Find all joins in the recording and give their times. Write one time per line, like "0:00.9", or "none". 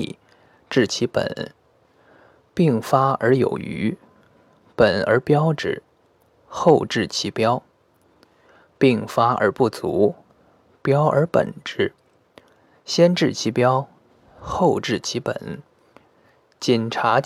0:06.3